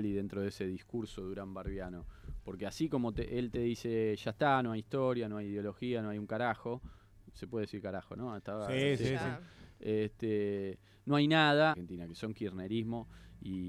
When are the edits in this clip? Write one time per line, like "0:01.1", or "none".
0:11.7